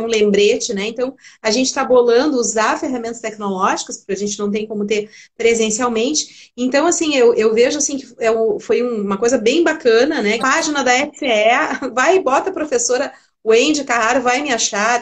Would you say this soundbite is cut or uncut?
cut